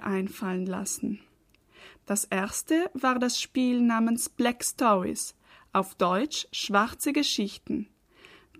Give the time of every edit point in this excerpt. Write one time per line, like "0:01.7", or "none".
none

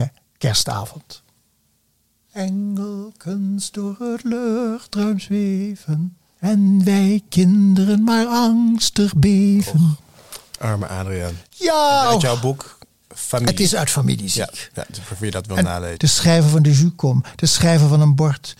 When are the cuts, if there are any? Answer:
0:12.0
0:16.0

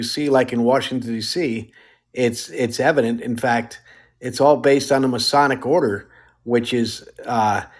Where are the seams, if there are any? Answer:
none

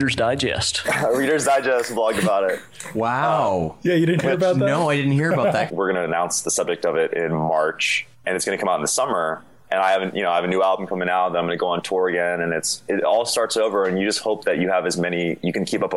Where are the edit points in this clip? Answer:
0:05.7

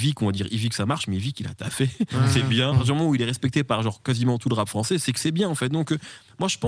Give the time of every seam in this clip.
0:02.7

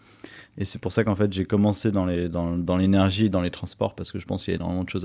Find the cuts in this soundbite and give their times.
none

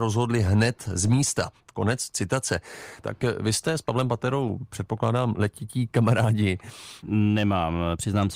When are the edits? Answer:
0:03.0
0:07.0

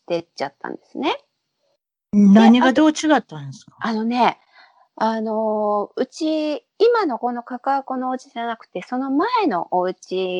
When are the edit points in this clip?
0:07.2

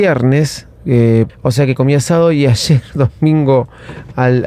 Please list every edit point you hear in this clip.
0:01.3

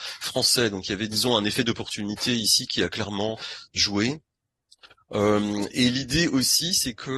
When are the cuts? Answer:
none

